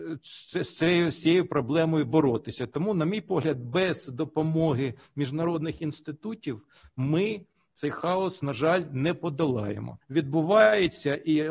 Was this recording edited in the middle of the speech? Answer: yes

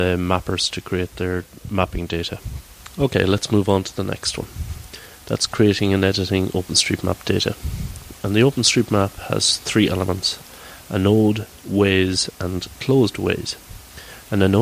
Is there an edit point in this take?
no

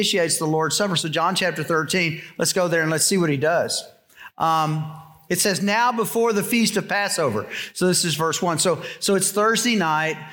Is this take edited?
no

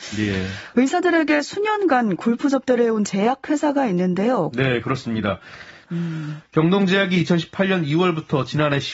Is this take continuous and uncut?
no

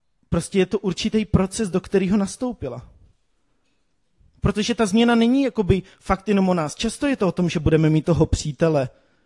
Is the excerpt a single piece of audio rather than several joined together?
yes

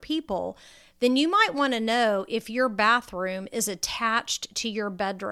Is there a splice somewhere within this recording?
no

